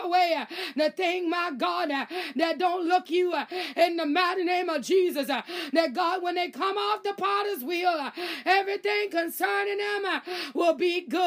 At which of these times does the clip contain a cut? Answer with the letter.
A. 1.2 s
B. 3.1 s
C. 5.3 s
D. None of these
B